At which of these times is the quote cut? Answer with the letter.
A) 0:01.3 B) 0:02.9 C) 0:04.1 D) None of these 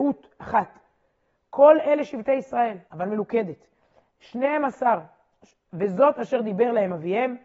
B